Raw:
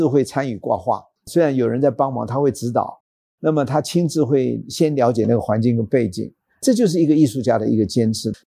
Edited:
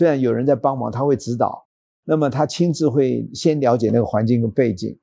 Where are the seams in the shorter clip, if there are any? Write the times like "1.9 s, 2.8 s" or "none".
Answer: none